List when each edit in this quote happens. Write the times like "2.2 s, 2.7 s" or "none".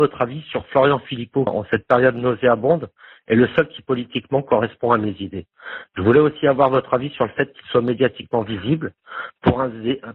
1.5 s